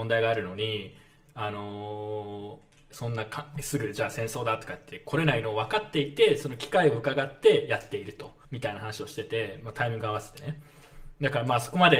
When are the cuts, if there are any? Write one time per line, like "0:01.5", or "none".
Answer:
0:02.9
0:08.4